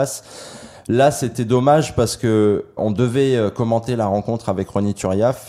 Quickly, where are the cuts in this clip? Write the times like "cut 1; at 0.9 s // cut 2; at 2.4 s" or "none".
cut 1; at 2.8 s